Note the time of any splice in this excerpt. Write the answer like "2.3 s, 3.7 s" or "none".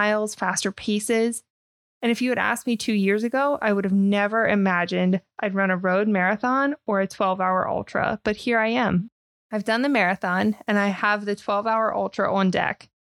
none